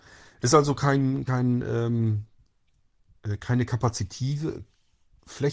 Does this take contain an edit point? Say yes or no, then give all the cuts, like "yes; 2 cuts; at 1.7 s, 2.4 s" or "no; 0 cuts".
no; 0 cuts